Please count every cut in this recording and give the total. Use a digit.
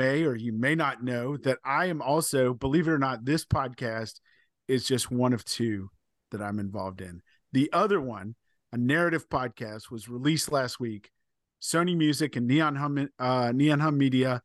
0